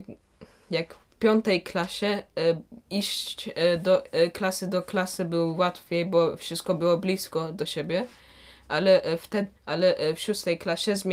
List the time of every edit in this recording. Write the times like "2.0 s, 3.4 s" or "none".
2.8 s, 9.6 s